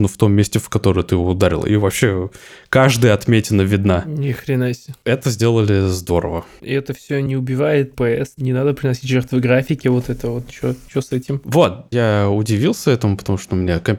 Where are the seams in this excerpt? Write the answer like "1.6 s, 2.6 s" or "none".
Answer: none

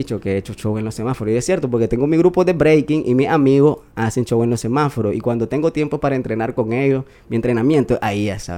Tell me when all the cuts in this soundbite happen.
none

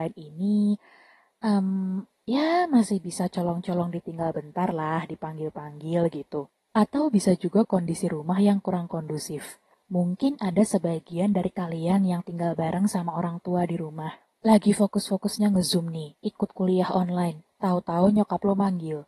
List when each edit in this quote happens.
9.7 s

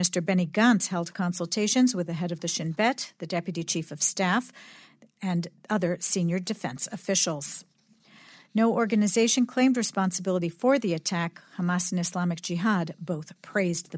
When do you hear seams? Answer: none

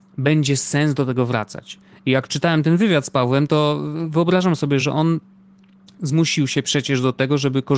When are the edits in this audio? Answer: none

